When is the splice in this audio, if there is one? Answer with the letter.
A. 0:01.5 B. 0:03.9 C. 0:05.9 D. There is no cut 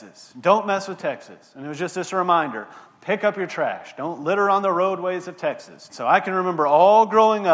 C